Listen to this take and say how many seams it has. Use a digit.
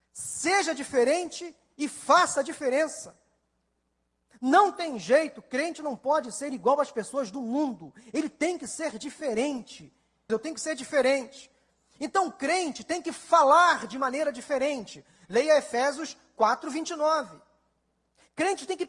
1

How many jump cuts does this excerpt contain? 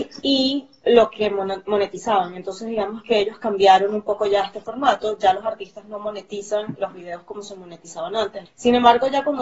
1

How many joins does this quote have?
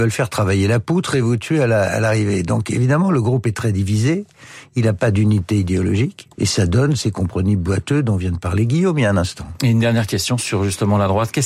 1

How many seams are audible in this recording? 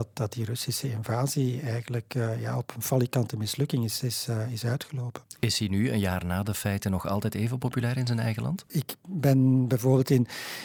1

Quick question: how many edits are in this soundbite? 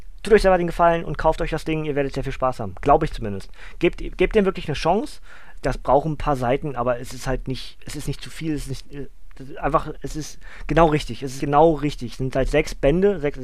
2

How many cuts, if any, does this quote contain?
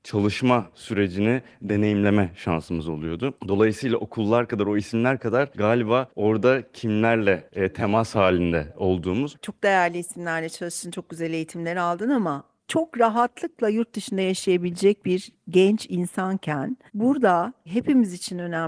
1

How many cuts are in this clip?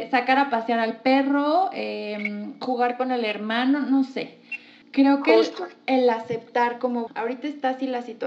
2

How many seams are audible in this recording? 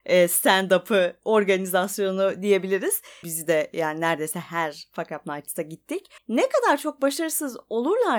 2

